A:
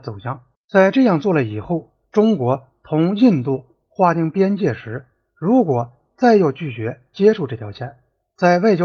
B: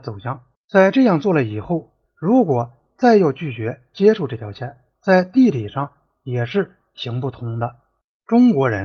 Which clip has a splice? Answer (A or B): B